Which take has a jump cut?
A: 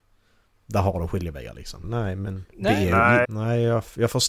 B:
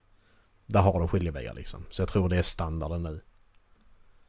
A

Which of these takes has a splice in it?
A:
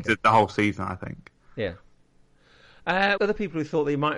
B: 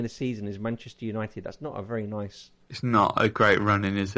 A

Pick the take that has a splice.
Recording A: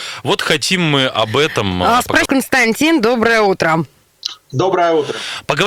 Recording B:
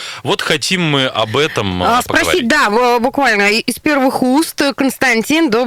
A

